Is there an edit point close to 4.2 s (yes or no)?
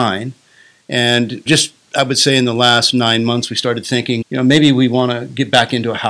yes